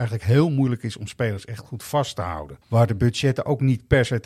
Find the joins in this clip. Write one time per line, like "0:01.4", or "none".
0:02.6